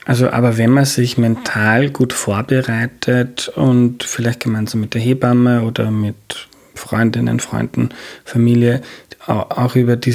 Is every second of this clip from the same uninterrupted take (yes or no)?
yes